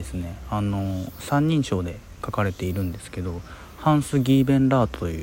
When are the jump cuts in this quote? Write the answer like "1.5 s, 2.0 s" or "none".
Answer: none